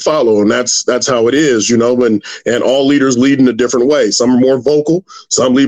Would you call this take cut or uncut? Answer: uncut